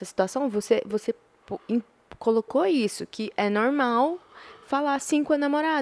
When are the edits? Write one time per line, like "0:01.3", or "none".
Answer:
none